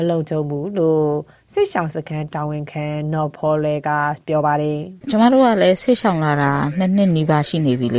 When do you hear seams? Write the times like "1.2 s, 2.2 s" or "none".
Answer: 5.0 s